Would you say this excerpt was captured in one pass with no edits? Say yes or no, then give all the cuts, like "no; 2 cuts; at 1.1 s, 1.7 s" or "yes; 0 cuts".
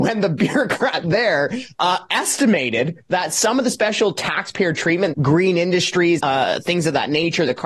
no; 2 cuts; at 5.1 s, 6.2 s